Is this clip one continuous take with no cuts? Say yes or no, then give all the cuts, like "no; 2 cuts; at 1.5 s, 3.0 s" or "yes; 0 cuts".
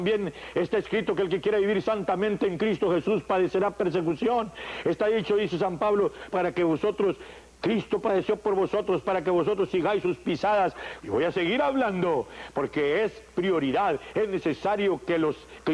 no; 2 cuts; at 6.3 s, 11.0 s